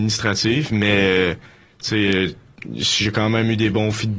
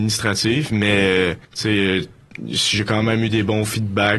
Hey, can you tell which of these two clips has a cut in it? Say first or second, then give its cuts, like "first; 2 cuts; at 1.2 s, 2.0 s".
second; 1 cut; at 1.4 s